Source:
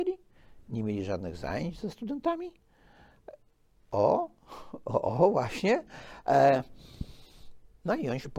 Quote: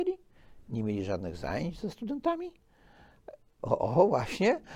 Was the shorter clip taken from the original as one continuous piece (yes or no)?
no